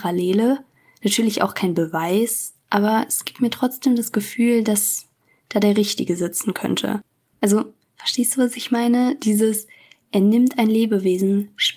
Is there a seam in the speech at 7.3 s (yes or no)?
yes